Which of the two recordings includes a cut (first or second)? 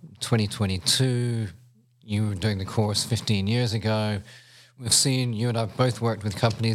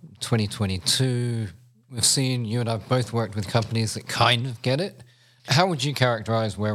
second